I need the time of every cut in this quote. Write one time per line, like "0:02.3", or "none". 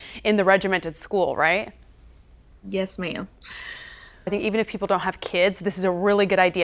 0:04.3